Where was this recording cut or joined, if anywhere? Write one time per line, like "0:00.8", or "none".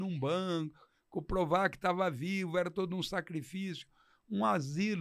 none